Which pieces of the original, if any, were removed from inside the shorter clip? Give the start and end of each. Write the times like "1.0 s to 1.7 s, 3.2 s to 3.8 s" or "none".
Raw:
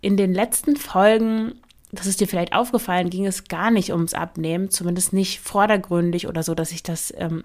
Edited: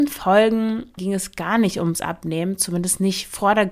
1.7 s to 3.1 s

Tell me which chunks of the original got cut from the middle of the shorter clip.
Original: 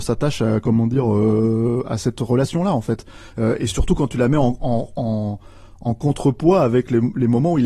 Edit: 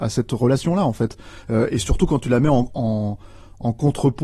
4.6 s to 4.9 s

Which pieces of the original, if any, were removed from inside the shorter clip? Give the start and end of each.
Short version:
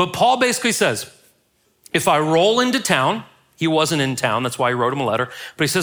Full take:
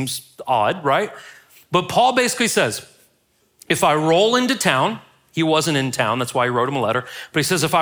none

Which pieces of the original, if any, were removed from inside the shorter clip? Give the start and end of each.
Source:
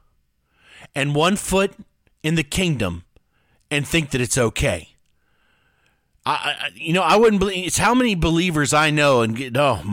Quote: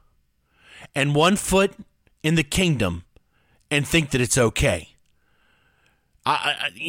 none

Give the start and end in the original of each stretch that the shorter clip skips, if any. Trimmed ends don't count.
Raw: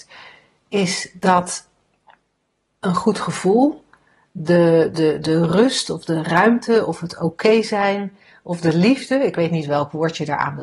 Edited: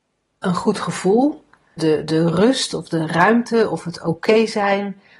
4.2 s to 4.9 s

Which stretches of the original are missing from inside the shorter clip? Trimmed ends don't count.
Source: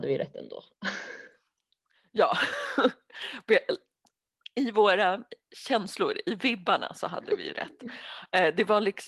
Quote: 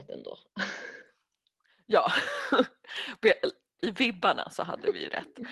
4.0 s to 6.2 s

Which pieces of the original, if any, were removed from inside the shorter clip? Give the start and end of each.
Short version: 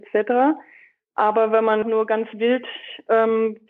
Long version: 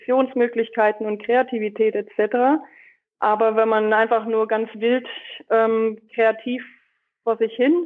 3.9 s to 4.2 s

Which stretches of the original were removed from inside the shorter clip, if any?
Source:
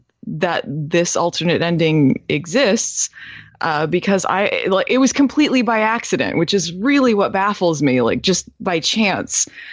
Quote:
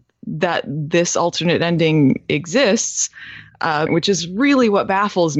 3.9 s to 6.3 s

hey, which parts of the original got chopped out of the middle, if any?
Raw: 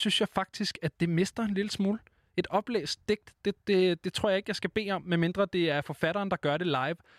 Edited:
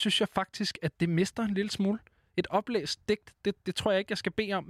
3.6 s to 4.0 s

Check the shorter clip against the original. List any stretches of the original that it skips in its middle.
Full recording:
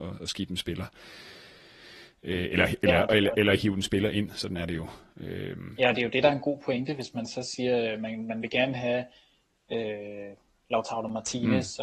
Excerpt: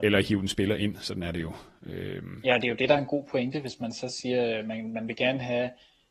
none

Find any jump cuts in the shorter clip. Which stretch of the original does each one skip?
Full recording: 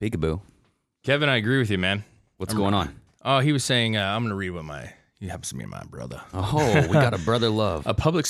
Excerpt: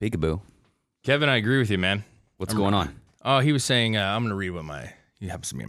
none

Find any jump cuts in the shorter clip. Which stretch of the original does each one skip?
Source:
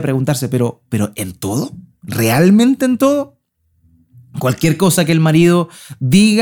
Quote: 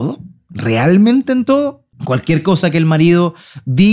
3.5 s to 4.3 s

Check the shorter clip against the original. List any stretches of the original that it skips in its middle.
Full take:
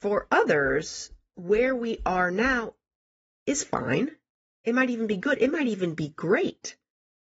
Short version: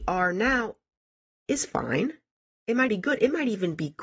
4.9 s to 5.1 s

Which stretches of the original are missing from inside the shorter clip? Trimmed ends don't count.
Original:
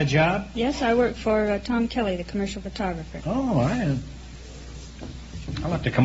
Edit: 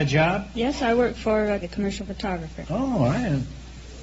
1.6 s to 2.2 s

